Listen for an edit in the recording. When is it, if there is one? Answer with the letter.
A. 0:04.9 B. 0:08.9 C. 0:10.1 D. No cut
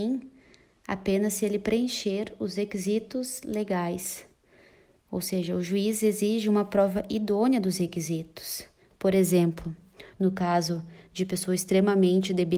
C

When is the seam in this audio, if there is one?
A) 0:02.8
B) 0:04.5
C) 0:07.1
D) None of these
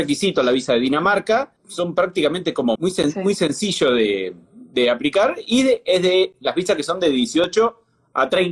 A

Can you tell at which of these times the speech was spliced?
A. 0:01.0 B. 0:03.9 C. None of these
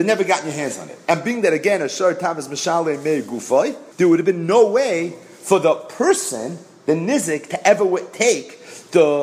B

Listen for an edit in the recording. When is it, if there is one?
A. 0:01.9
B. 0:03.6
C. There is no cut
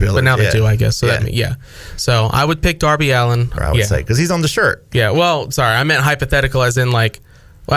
B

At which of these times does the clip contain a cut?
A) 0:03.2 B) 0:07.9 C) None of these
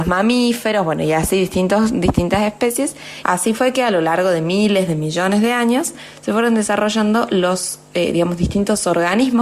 A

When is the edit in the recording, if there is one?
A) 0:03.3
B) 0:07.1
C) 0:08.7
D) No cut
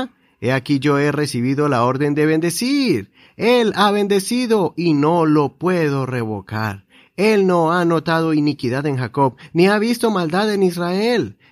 D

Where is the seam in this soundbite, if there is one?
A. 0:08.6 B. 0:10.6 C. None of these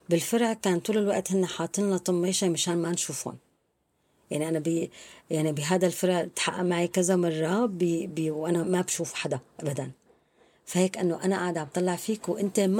A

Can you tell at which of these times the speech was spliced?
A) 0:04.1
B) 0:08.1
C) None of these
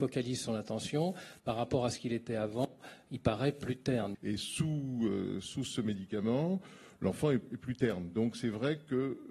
A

